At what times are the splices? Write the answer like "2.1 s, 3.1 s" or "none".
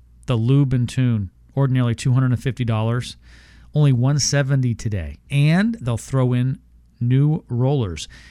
5.3 s